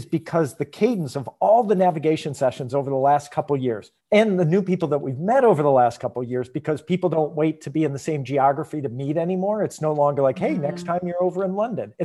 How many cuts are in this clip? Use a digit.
1